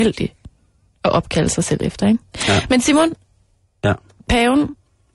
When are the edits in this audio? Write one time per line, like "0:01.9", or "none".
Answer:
none